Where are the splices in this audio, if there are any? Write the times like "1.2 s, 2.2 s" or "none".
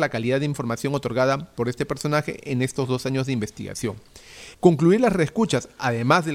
4.5 s